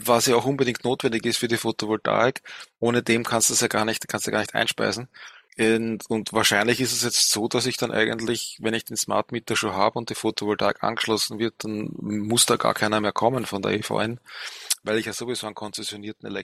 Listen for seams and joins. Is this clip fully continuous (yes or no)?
yes